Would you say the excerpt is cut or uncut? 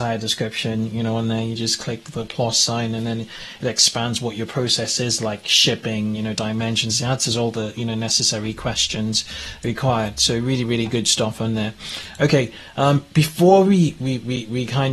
uncut